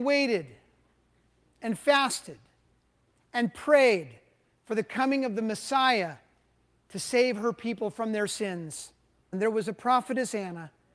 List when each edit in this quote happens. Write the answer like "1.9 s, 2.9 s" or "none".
9.3 s